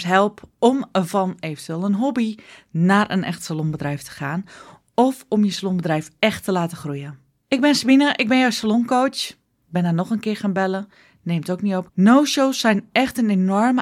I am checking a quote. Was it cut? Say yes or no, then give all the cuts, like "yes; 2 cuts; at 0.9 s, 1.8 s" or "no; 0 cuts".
yes; 2 cuts; at 9.6 s, 11.9 s